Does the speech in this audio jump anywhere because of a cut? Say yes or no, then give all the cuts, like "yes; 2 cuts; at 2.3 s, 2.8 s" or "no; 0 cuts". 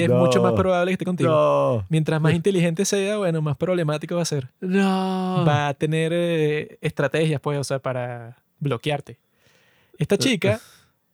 no; 0 cuts